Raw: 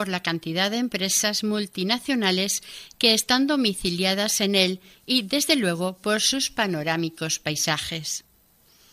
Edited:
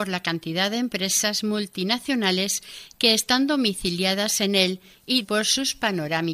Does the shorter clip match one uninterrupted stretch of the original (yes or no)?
no